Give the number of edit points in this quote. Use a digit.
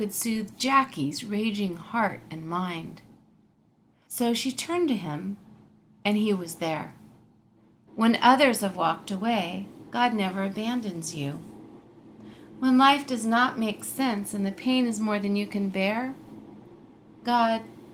2